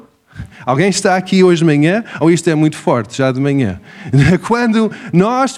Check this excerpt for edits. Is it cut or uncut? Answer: uncut